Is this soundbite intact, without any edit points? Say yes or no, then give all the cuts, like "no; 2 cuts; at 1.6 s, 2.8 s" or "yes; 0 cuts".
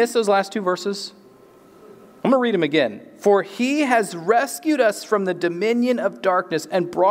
yes; 0 cuts